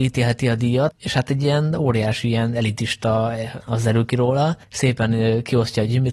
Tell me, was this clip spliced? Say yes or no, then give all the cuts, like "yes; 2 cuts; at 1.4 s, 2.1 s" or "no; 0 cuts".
yes; 2 cuts; at 0.9 s, 3.6 s